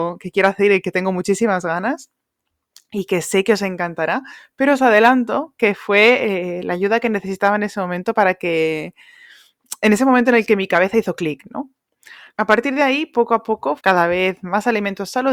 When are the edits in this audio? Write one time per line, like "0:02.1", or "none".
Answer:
0:12.3
0:13.8